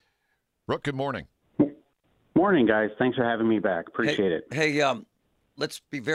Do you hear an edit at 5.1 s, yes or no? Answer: no